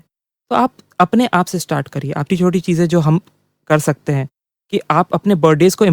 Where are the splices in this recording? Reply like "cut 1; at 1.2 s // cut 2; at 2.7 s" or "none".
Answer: cut 1; at 2.3 s